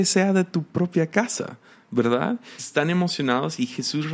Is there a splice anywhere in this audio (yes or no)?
yes